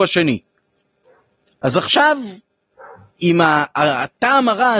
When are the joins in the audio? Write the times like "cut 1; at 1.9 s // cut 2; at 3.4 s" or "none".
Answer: cut 1; at 3.2 s